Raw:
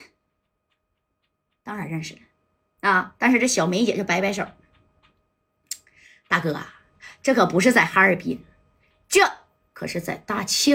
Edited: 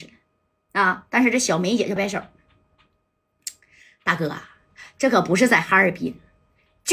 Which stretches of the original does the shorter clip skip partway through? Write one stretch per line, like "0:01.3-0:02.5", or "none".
0:04.0-0:04.2